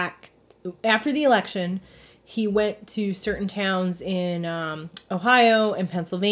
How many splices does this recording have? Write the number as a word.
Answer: zero